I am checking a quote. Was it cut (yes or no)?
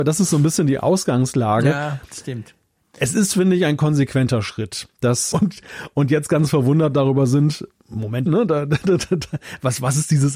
yes